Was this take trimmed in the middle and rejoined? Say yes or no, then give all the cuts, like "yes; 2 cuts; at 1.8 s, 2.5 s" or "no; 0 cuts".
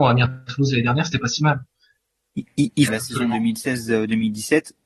yes; 1 cut; at 2.9 s